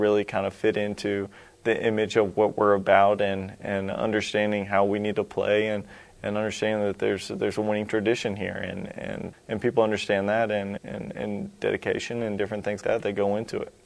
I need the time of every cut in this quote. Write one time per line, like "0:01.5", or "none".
0:09.3
0:10.8
0:12.8